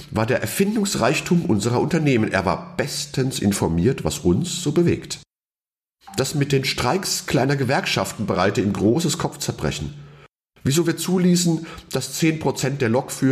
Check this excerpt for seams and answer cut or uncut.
uncut